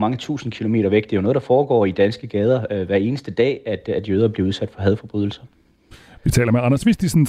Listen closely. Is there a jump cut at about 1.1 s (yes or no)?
no